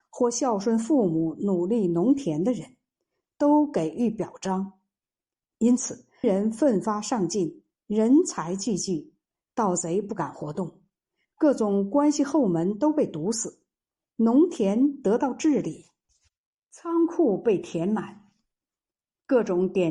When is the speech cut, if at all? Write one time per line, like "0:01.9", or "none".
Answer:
0:06.2

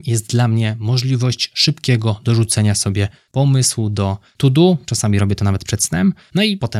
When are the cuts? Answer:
none

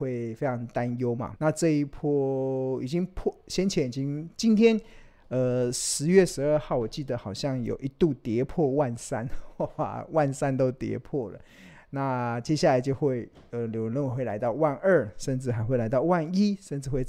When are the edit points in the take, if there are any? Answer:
0:01.4

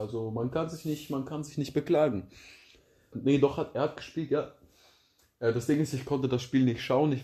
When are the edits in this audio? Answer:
0:03.1

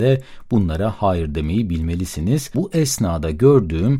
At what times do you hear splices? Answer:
0:02.5

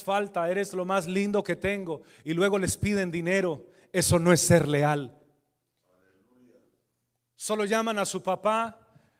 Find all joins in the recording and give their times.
none

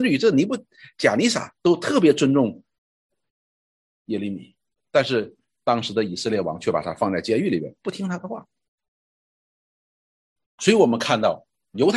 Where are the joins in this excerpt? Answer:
none

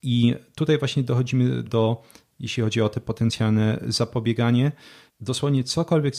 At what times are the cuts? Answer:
0:01.7
0:05.1

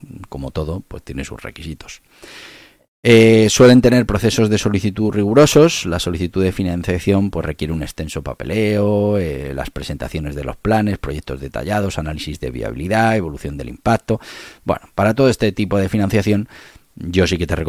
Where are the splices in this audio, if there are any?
none

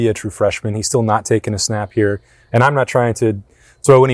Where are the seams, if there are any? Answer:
none

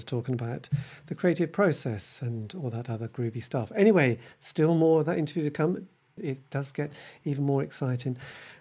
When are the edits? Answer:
0:06.2

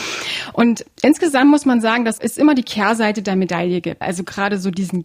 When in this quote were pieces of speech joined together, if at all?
0:02.2
0:04.0

